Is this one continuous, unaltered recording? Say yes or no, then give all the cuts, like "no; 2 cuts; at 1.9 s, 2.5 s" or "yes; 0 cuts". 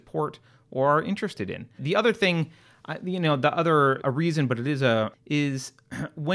no; 3 cuts; at 1.8 s, 4.0 s, 5.1 s